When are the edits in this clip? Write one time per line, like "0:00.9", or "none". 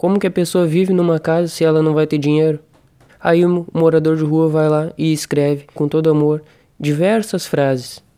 0:03.1
0:05.8